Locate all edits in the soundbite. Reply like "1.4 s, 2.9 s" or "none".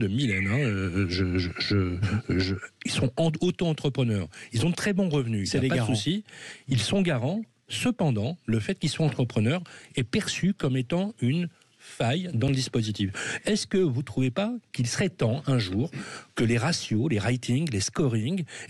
none